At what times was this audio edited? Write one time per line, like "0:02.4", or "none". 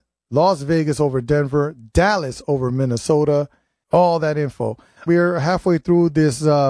0:03.8
0:05.1